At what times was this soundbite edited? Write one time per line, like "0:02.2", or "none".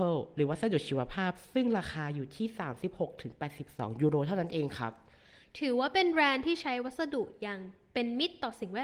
none